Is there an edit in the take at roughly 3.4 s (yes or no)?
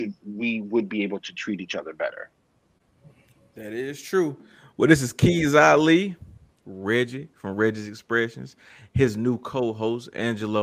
no